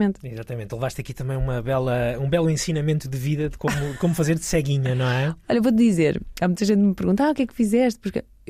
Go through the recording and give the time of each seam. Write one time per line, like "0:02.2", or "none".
none